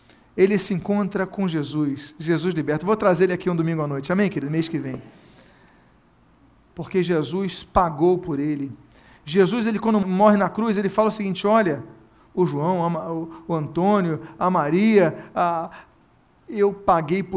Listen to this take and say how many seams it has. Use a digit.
2